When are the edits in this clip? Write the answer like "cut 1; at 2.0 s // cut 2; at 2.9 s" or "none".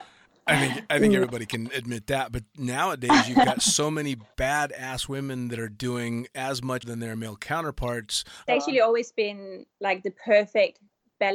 cut 1; at 6.8 s // cut 2; at 8.5 s // cut 3; at 9.7 s